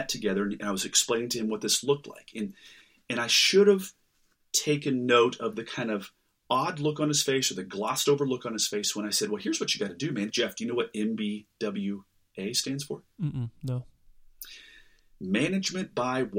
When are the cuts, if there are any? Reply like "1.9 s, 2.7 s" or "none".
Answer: 10.3 s